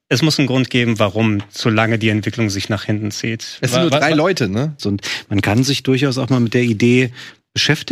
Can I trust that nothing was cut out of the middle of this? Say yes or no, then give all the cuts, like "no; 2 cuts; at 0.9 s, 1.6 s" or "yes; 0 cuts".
no; 1 cut; at 4.8 s